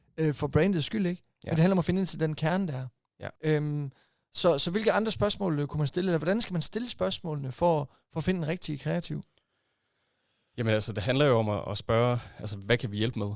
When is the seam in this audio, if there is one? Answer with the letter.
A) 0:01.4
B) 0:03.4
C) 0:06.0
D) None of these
B